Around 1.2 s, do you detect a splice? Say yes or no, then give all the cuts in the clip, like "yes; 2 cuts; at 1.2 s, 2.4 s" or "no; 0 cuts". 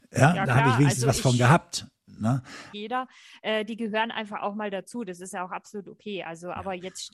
no; 1 cut; at 2.7 s